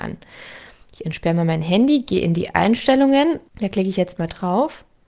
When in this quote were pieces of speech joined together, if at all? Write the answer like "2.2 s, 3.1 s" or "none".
3.5 s